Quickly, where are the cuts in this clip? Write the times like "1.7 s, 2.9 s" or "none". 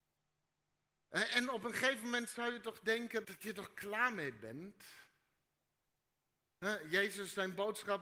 3.2 s

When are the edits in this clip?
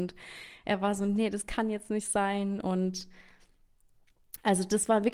none

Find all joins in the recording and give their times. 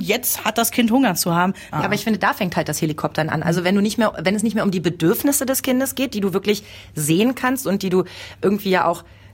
1.7 s

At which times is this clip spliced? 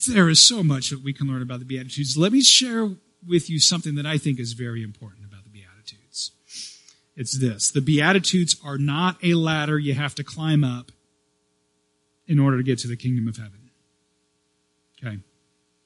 none

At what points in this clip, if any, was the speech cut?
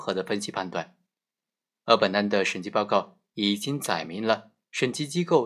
none

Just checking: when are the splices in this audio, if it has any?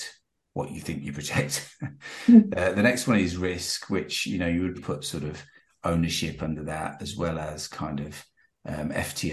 4.7 s

